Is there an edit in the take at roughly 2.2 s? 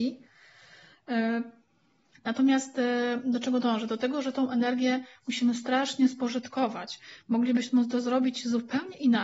yes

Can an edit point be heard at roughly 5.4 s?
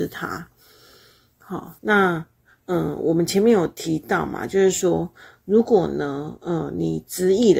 no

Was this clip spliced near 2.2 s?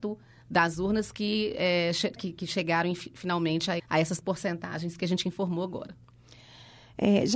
yes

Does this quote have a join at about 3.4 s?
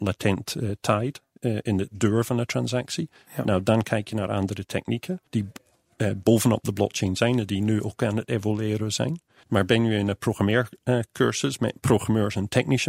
no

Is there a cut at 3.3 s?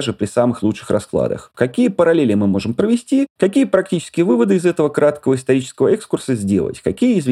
no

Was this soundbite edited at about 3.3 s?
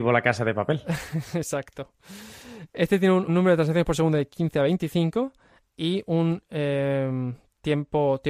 yes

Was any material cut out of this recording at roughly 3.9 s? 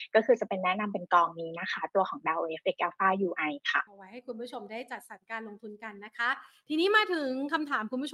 yes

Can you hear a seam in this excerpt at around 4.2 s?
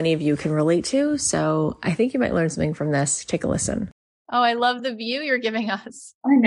yes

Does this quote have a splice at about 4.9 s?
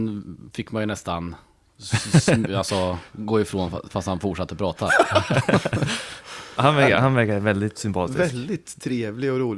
no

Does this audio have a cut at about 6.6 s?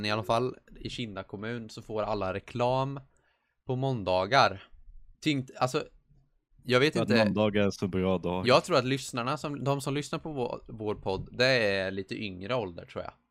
no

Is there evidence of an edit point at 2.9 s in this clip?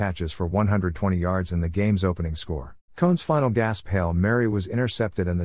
yes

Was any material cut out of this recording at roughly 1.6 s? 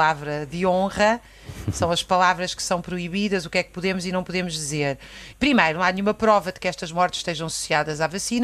no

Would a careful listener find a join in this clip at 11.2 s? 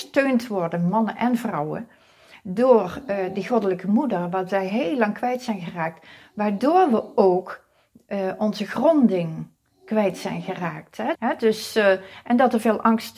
yes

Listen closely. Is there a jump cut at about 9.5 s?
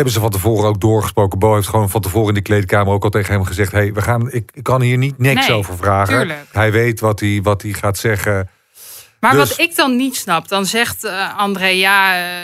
no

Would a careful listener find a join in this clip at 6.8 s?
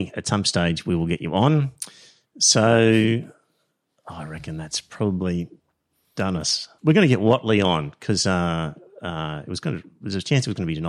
yes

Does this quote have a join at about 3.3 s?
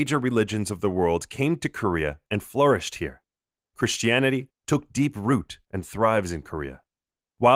no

